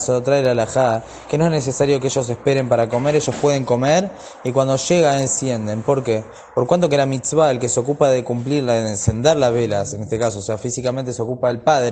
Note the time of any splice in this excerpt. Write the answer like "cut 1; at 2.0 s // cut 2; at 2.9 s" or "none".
none